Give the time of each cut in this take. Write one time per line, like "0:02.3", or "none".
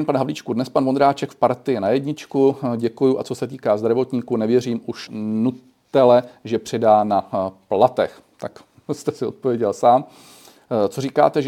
0:05.1